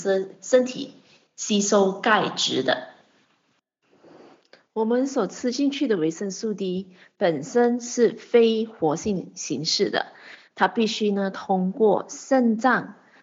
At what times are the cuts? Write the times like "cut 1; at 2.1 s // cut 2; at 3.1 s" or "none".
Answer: none